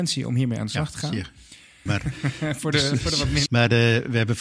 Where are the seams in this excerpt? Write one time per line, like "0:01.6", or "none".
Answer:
0:01.9
0:03.5

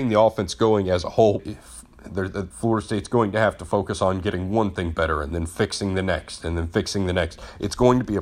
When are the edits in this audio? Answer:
0:01.4
0:02.5

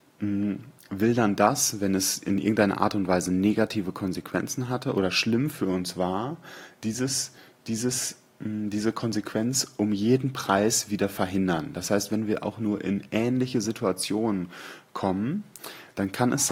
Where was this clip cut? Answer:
none

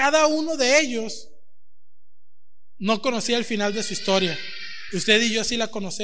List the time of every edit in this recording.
none

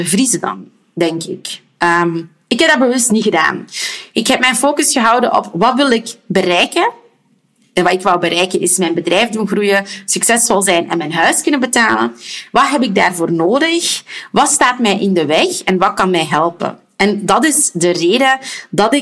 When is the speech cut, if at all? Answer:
none

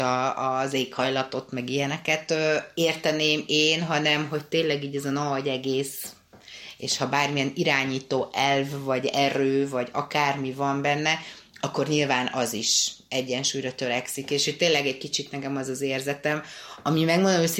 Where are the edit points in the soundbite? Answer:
none

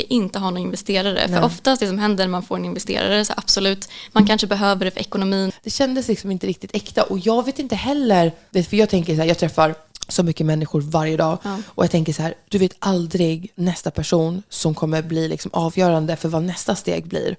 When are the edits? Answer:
0:05.5

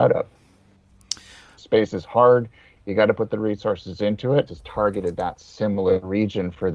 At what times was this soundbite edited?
0:01.6
0:04.5

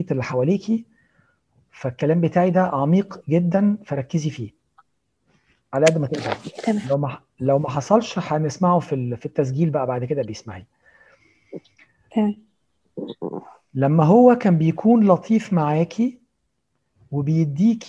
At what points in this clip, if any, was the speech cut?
none

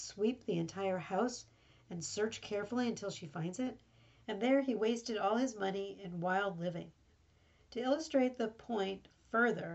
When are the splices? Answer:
0:04.2
0:07.1

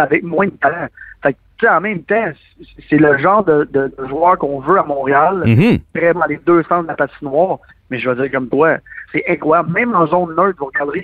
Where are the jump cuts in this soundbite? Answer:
0:06.1
0:09.1

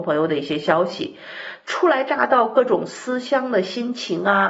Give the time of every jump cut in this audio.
none

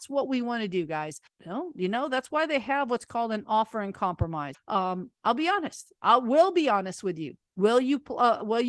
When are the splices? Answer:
0:01.3
0:04.5

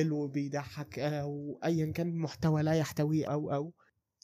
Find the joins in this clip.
0:03.3

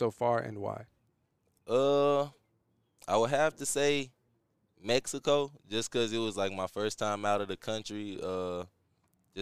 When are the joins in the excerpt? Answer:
none

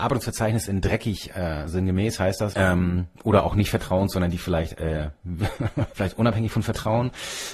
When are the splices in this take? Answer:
0:02.5
0:05.9

